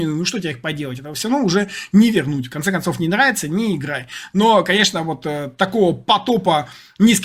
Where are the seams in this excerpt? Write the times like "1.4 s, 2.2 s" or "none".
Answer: none